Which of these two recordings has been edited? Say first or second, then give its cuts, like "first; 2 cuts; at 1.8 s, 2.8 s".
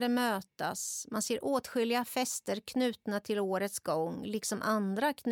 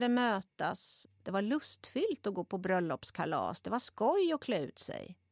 second; 1 cut; at 1.1 s